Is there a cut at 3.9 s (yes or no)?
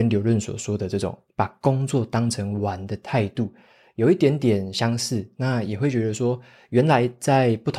no